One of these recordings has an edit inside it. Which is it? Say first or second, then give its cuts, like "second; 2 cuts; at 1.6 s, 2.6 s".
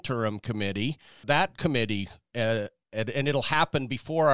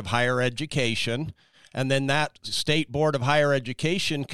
first; 1 cut; at 1.2 s